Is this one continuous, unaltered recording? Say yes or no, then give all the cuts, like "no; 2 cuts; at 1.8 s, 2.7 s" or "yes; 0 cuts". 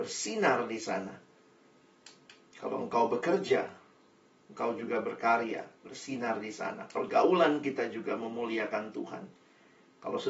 yes; 0 cuts